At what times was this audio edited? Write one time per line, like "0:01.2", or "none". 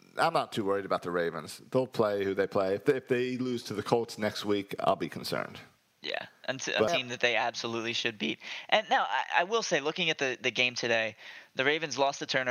0:06.9